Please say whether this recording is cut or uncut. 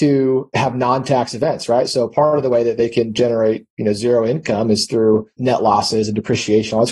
uncut